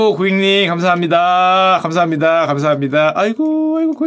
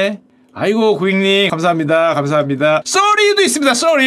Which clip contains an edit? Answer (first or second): second